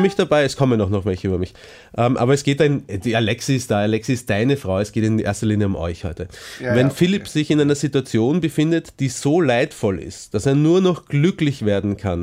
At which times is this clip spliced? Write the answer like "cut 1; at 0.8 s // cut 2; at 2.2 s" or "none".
none